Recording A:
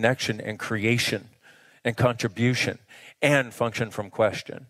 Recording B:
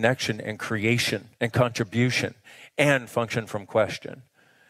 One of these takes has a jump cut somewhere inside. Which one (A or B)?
B